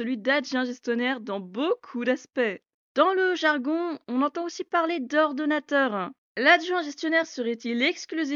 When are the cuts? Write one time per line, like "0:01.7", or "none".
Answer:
0:02.9
0:06.2